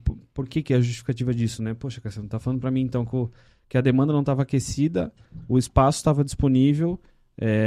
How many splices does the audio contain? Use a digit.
0